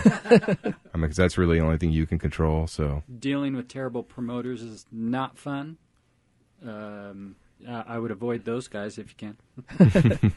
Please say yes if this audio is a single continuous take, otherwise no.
no